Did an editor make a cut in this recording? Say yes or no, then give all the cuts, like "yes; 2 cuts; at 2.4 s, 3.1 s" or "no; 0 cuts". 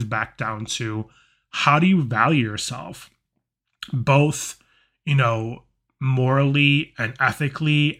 no; 0 cuts